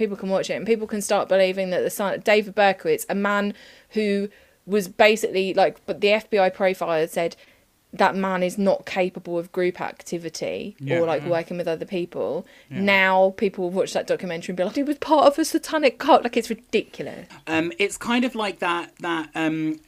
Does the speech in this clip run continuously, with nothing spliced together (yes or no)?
no